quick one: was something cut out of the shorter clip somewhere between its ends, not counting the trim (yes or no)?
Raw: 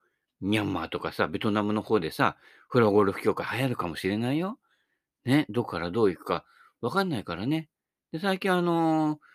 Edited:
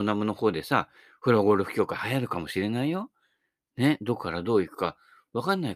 no